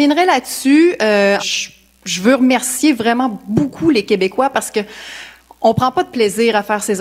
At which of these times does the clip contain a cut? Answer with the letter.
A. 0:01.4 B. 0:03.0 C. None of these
A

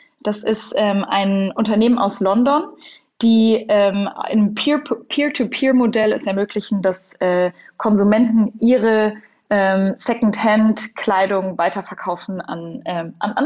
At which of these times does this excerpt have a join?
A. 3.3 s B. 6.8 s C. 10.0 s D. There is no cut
D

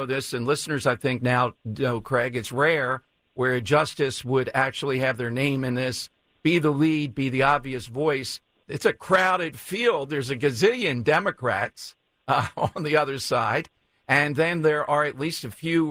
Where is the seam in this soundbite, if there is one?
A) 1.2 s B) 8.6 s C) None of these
B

